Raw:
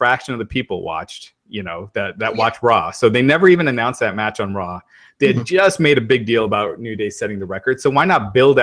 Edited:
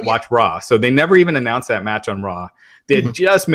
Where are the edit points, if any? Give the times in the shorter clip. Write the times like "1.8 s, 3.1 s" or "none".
none

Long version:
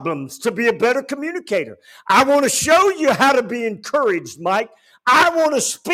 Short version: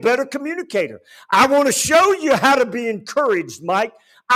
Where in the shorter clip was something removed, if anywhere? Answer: none

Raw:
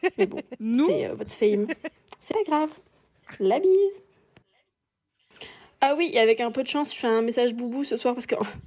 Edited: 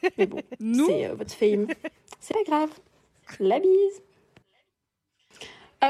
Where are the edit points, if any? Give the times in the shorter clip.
none

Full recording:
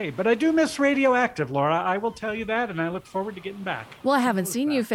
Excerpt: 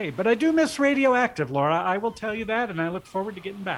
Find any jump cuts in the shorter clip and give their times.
none

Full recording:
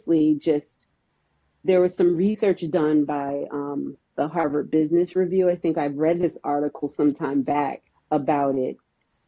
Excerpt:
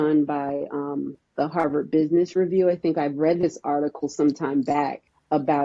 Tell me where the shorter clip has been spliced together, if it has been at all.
none

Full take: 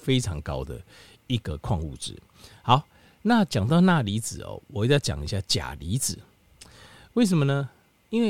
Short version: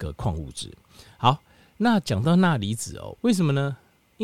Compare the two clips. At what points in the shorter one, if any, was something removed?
3.2 s

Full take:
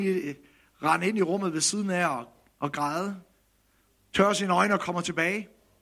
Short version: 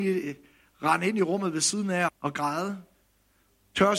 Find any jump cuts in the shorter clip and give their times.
2.1 s

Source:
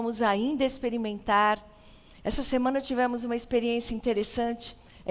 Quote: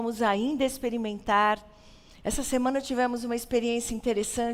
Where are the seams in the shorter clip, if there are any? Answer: none

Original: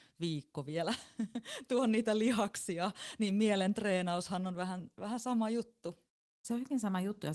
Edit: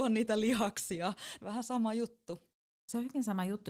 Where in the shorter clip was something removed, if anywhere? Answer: 1.4 s

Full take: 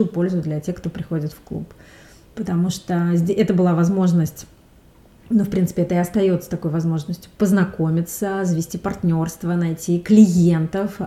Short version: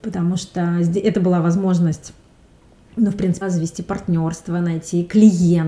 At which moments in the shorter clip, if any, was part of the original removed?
3.4 s

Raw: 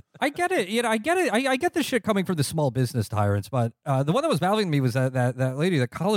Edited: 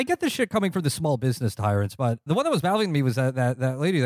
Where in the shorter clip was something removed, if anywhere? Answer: 2.3 s

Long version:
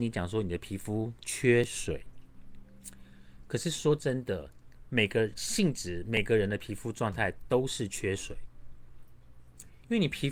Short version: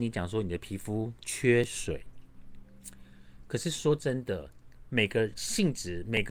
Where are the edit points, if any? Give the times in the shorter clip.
none

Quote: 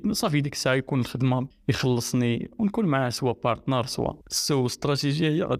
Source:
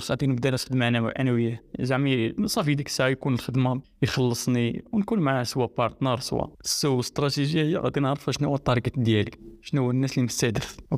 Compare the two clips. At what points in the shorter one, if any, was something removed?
none

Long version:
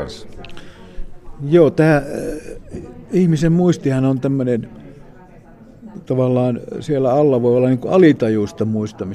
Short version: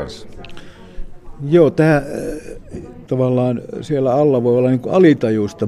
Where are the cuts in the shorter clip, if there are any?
3.1 s

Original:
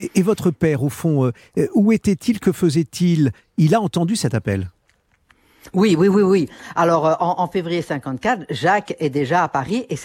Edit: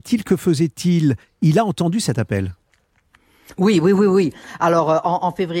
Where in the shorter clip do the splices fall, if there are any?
none

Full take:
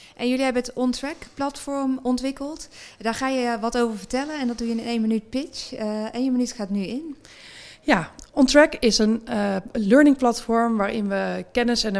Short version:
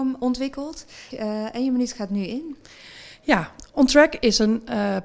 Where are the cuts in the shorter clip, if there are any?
1.1 s

